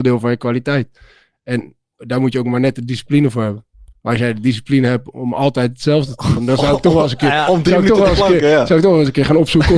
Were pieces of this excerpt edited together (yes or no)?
no